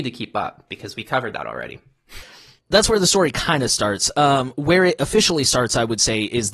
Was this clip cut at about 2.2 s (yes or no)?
yes